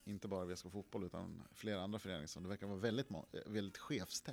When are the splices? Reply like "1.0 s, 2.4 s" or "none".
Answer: none